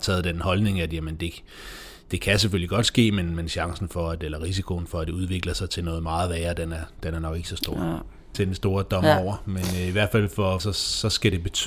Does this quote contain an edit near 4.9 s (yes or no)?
no